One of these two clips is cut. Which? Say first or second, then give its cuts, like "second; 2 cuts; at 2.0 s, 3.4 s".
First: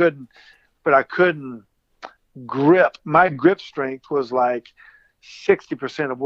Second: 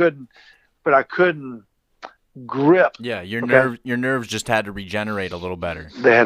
second; 1 cut; at 3.0 s